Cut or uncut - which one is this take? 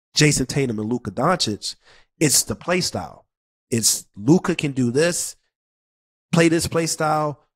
uncut